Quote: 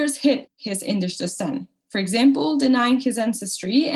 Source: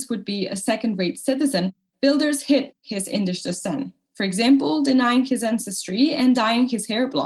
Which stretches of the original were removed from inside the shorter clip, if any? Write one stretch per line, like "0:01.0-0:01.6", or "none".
none